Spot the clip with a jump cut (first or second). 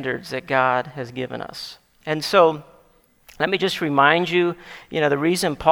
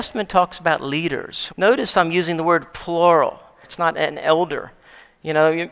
second